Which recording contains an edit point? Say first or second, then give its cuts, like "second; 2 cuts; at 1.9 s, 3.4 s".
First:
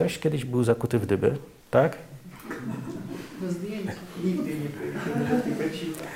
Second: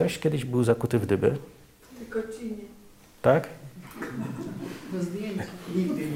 first; 1 cut; at 1.6 s